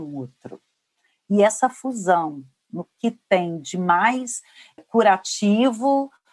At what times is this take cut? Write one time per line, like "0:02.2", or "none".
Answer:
0:04.8